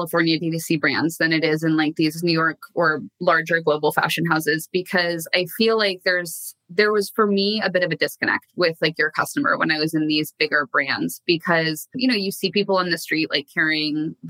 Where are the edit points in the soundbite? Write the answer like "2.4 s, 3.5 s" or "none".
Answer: none